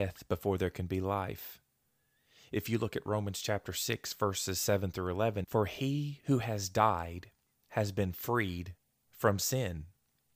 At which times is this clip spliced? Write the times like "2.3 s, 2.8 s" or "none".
5.4 s